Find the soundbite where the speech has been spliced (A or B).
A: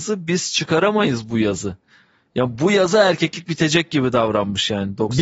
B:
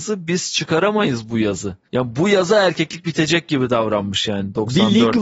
B